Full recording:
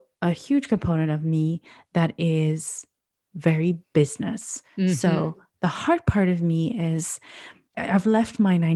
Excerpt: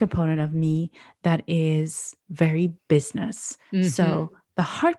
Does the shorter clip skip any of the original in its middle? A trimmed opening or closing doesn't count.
yes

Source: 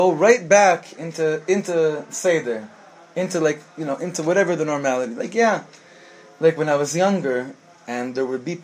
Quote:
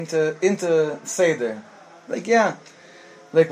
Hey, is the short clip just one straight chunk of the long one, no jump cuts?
no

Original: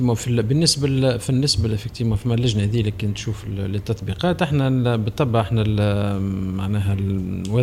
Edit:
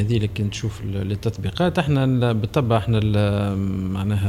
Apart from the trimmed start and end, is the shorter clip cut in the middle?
no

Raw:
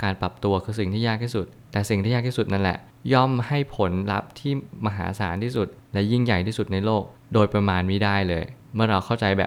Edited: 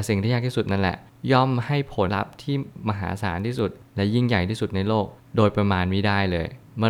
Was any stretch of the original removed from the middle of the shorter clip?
yes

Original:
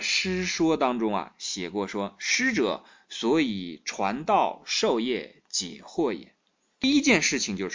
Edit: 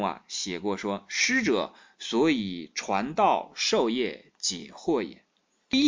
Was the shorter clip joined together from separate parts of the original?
no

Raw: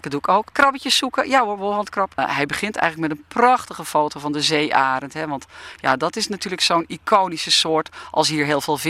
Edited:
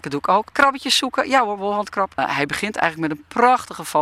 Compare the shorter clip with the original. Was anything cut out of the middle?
no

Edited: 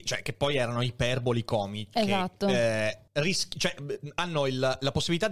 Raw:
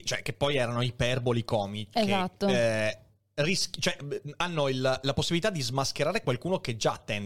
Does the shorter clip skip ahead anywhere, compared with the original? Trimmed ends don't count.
yes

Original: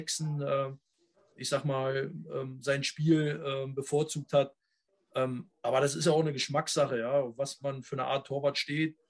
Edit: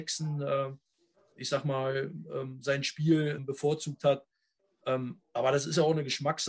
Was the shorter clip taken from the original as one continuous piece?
no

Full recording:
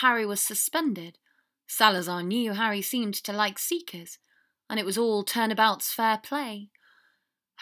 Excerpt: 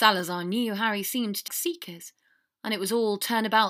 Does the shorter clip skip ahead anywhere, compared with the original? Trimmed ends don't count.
yes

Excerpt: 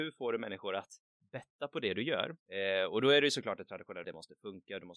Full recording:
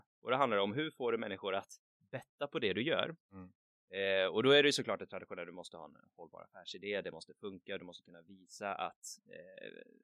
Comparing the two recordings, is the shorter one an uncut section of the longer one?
no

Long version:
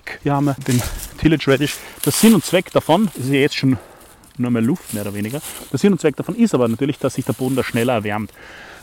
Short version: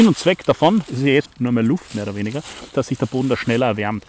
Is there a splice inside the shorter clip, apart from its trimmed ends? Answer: yes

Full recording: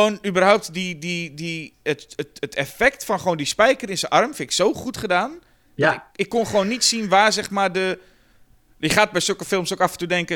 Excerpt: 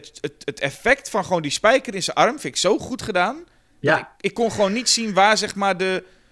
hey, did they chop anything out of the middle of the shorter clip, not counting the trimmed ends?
no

